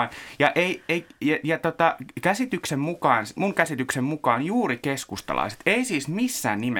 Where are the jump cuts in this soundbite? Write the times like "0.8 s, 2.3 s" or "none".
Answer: 3.4 s